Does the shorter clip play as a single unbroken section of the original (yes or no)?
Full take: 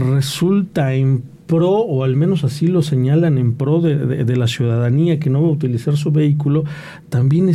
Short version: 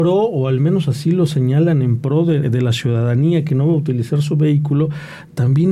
no